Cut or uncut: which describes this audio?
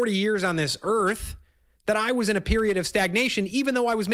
uncut